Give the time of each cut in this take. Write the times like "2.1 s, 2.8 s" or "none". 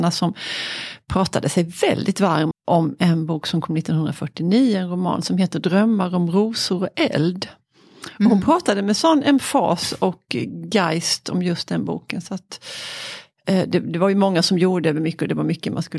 2.5 s